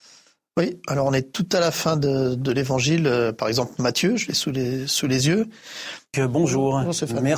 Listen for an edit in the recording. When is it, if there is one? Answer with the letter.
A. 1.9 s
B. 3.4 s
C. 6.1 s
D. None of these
C